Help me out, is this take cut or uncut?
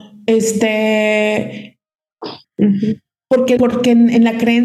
cut